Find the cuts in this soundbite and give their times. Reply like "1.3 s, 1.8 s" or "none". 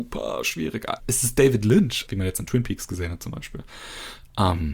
1.0 s, 2.1 s